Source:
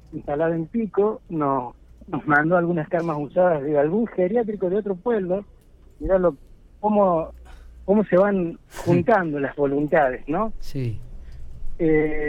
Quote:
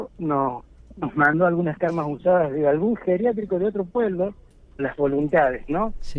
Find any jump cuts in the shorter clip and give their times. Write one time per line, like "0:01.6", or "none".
0:04.8